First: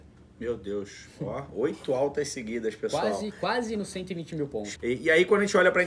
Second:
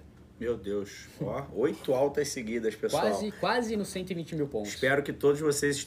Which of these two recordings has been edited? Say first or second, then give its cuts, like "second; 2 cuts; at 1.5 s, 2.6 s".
first; 1 cut; at 4.8 s